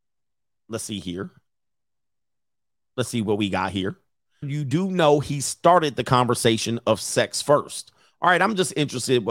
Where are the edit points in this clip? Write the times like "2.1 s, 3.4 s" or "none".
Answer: 4.4 s

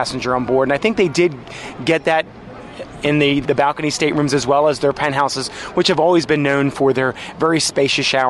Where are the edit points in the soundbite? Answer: 3.4 s

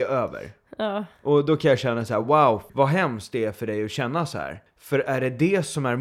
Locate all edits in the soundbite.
none

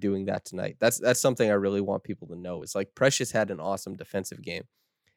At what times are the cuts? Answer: none

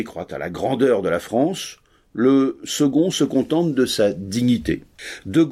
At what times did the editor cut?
none

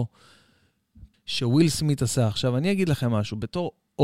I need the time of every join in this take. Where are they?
1.1 s

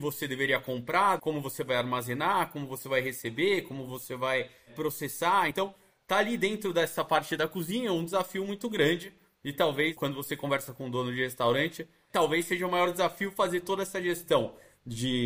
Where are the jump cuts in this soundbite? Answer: none

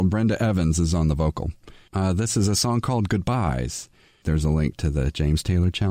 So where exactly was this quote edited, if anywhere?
1.9 s, 4.2 s

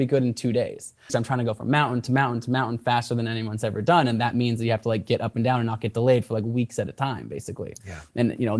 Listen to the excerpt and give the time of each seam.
1.1 s

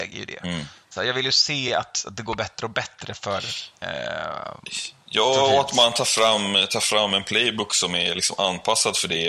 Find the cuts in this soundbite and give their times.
none

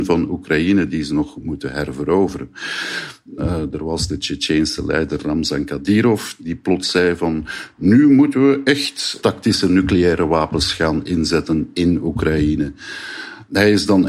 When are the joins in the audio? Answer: 3.4 s

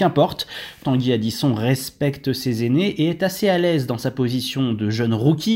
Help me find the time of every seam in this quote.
none

